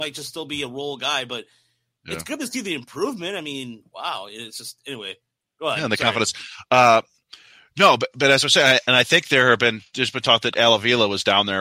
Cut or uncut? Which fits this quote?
uncut